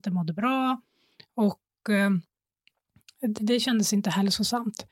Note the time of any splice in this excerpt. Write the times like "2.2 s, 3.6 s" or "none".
3.4 s